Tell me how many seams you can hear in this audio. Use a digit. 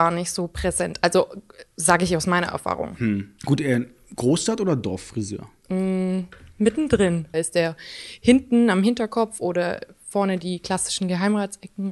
2